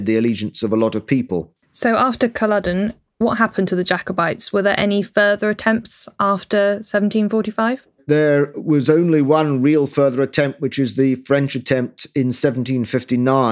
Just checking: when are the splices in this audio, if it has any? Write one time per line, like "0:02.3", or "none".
none

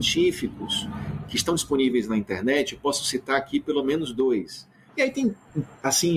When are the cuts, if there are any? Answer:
0:04.9

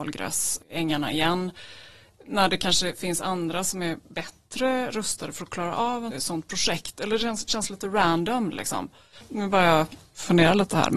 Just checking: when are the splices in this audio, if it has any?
0:06.1

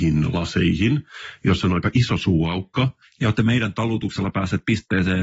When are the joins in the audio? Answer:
0:03.0

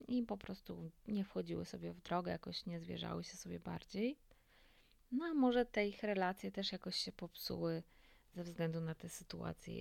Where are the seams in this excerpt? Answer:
none

